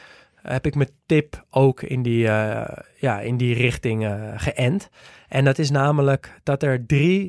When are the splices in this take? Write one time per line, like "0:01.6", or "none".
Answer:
none